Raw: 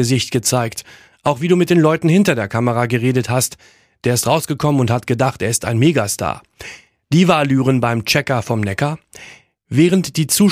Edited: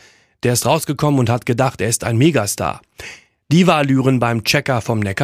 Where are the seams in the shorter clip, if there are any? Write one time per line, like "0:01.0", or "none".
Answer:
none